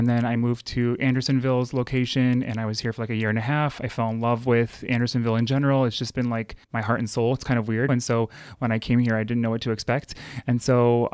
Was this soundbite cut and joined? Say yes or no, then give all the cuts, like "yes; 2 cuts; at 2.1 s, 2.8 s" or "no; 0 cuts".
yes; 2 cuts; at 6.6 s, 7.9 s